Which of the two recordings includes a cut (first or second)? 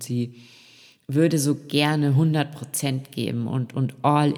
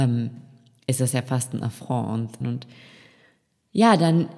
second